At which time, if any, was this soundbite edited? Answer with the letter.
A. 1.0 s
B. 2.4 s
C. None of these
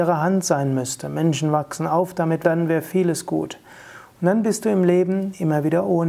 B